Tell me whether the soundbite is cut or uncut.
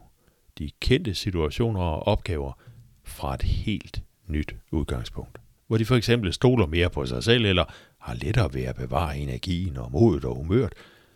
uncut